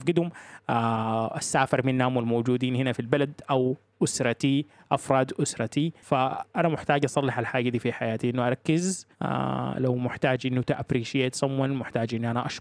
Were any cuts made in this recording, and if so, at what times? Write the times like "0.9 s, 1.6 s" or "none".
9.1 s